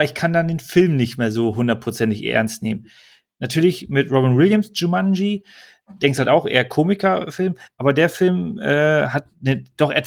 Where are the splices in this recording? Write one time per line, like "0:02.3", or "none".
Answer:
none